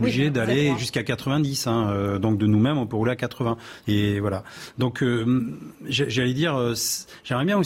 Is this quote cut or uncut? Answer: uncut